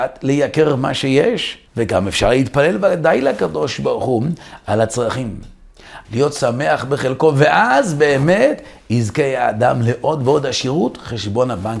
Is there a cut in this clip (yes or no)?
yes